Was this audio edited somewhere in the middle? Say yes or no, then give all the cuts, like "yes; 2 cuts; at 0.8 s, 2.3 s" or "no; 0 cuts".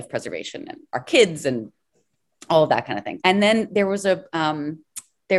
yes; 1 cut; at 3.2 s